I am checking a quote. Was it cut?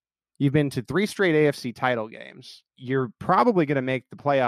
yes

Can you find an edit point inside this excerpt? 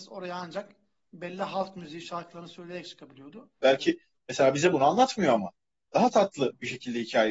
yes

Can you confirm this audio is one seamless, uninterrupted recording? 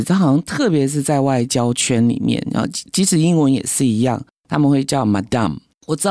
yes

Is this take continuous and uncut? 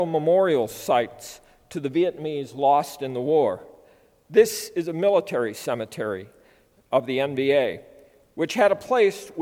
yes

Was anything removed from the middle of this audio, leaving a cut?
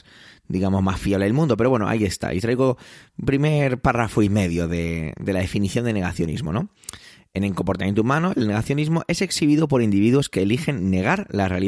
no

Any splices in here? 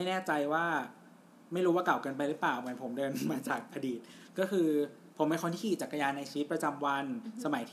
no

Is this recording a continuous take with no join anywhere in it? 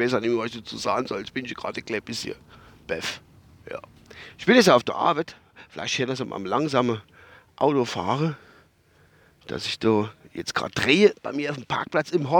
yes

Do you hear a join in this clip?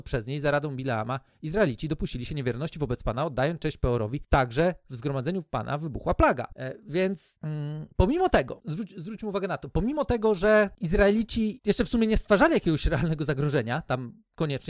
no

